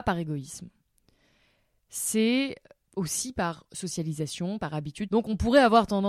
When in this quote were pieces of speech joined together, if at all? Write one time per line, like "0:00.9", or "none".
0:05.1

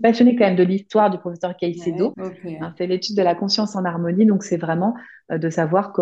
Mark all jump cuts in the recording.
0:02.1

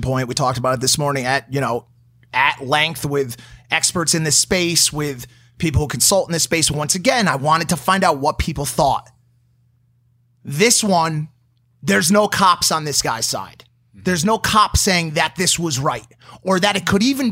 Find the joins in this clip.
none

